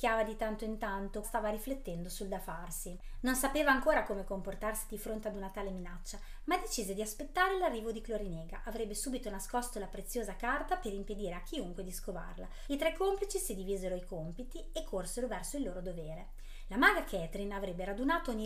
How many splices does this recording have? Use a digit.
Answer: 2